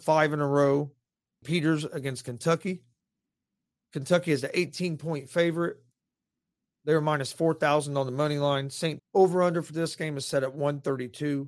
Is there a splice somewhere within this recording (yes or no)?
yes